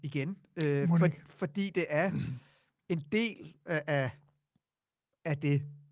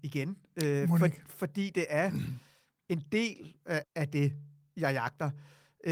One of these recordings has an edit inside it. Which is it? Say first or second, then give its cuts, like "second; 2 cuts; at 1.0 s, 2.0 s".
second; 1 cut; at 3.8 s